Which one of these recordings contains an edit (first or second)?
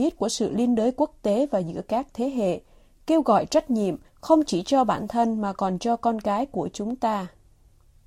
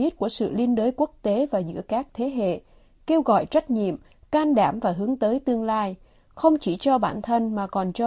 first